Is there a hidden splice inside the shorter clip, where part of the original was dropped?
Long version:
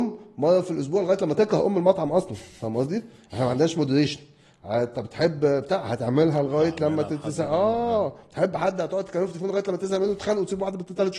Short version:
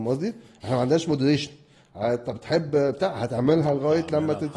no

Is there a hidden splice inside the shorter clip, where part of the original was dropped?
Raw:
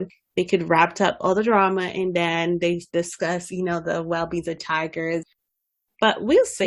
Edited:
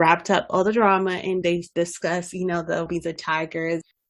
yes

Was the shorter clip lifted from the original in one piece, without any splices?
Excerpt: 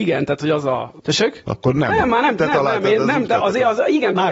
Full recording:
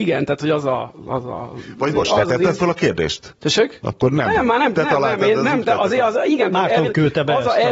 no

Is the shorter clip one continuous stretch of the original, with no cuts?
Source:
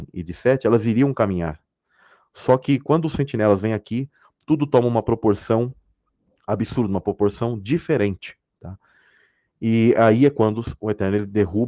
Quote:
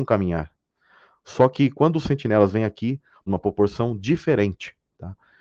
no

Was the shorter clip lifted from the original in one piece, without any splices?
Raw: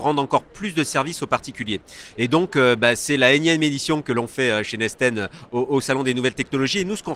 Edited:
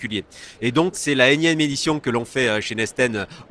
no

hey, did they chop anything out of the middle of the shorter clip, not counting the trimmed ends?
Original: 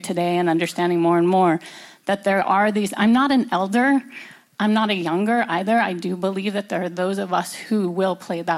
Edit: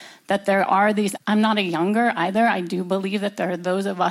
yes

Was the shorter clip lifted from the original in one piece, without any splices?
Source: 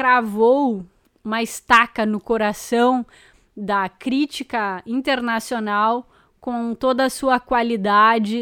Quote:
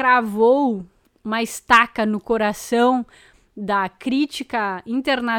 yes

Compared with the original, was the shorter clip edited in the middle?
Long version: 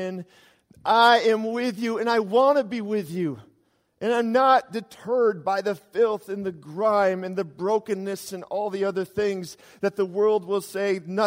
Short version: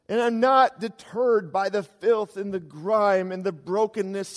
no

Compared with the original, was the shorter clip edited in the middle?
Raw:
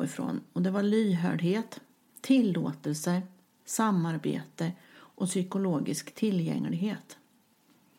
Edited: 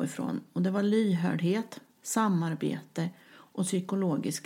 yes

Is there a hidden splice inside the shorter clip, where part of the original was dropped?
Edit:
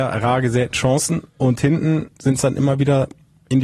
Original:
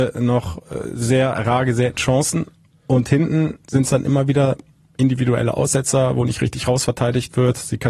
yes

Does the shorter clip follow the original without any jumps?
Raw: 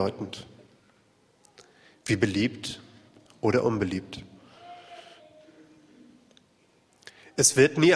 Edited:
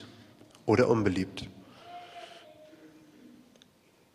yes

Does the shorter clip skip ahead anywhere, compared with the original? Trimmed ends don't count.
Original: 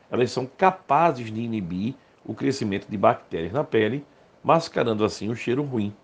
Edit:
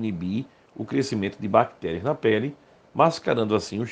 no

